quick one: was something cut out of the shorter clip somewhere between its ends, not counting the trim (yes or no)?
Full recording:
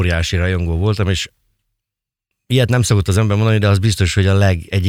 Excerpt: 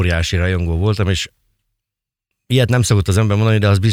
no